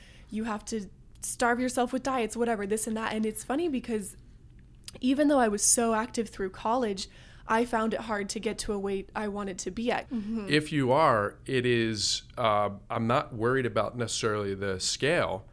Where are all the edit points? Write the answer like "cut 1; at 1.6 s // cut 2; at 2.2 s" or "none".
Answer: cut 1; at 10.0 s